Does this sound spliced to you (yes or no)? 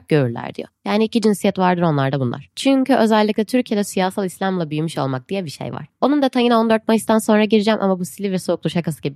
yes